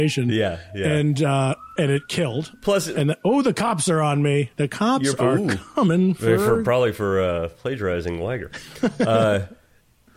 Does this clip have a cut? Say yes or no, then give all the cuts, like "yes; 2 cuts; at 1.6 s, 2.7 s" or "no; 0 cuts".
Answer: no; 0 cuts